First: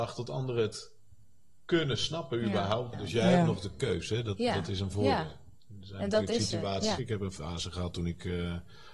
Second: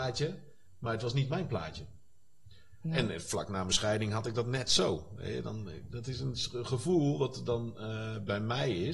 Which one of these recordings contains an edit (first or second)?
first